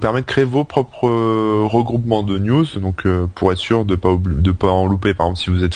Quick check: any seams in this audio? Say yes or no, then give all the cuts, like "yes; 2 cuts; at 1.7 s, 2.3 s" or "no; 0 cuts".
no; 0 cuts